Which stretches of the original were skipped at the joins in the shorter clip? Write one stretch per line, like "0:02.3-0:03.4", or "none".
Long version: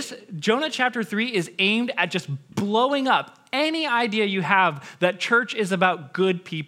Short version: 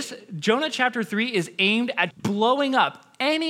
0:02.1-0:02.4